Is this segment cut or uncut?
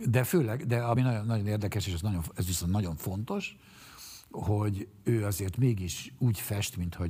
uncut